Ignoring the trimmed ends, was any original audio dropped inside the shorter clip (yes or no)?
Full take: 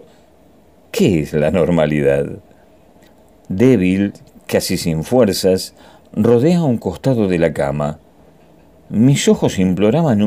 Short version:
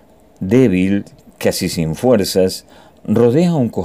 no